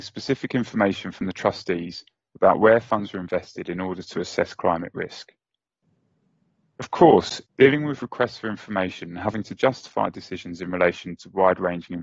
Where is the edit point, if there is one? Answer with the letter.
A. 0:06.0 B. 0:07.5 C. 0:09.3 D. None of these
B